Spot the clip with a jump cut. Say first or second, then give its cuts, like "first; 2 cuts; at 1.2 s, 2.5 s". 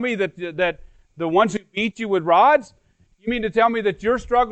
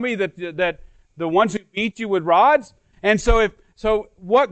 second; 1 cut; at 2.9 s